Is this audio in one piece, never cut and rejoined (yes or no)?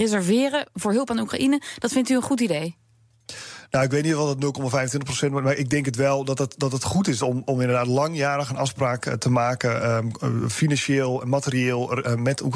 yes